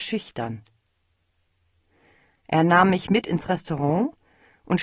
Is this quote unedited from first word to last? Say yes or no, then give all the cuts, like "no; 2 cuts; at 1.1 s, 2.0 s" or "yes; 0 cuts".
yes; 0 cuts